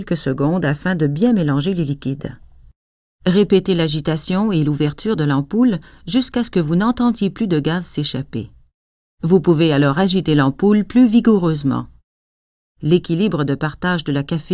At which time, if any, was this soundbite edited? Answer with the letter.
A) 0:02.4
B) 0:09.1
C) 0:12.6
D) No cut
D